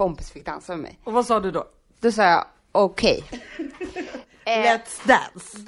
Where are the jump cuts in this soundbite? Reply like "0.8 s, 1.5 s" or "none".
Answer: none